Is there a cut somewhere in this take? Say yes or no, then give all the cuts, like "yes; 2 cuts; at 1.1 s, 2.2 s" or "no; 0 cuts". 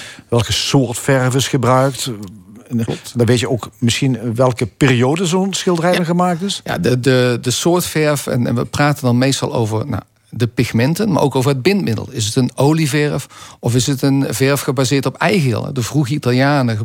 no; 0 cuts